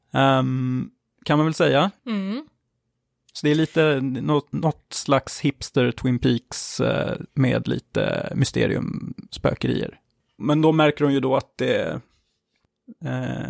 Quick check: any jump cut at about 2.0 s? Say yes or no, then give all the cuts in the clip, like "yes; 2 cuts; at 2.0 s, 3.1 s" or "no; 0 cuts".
yes; 3 cuts; at 2.0 s, 7.3 s, 10.4 s